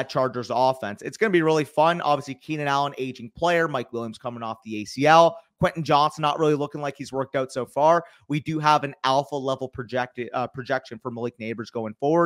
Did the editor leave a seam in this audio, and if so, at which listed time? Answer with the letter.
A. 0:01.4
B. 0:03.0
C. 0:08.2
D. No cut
D